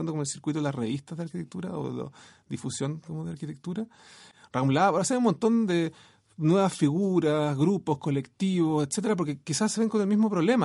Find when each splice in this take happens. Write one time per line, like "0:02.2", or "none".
none